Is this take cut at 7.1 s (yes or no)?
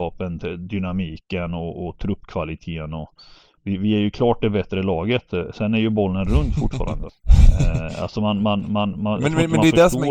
yes